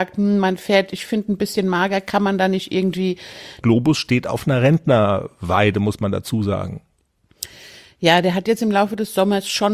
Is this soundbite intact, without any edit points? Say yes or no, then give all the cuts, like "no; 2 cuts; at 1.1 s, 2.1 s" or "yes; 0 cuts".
no; 1 cut; at 3.6 s